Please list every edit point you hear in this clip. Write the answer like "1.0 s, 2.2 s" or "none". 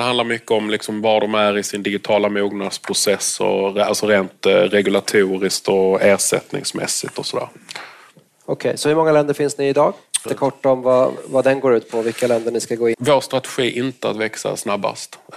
10.3 s, 12.9 s